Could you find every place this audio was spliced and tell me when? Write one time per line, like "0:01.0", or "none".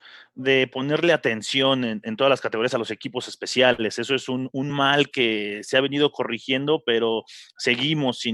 none